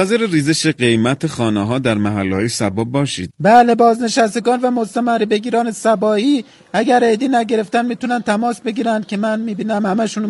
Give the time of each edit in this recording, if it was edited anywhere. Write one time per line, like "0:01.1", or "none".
0:03.3